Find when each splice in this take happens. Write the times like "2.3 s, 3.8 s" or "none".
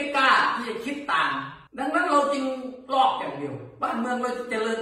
1.7 s